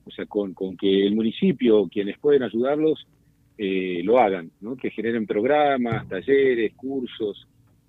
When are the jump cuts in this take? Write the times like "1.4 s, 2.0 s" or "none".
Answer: none